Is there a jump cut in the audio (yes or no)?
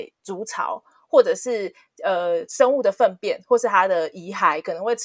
no